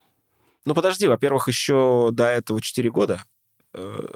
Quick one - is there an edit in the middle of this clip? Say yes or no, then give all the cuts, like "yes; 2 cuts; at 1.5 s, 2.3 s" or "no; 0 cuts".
no; 0 cuts